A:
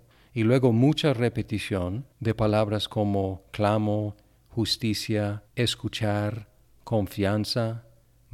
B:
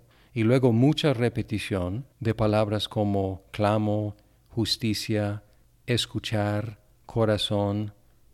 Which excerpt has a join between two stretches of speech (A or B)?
A